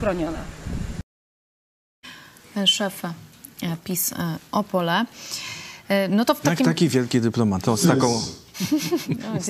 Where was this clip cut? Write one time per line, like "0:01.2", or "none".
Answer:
0:07.6